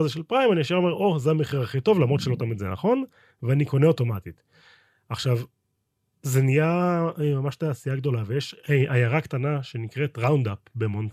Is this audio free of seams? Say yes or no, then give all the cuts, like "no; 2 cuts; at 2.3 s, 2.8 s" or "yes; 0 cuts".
yes; 0 cuts